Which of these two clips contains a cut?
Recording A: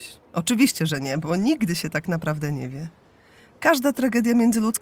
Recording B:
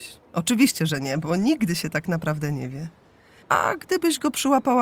B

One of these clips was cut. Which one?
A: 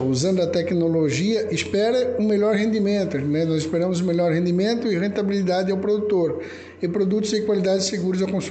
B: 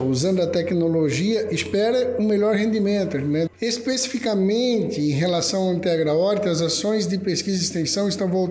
B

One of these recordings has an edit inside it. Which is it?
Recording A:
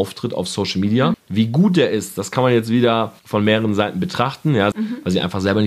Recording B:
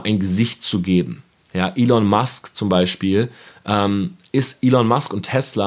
A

